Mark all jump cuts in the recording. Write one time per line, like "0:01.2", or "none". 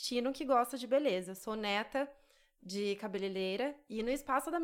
none